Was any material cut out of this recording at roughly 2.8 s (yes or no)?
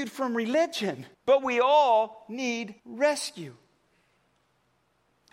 yes